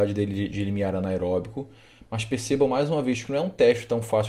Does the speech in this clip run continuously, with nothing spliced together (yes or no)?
yes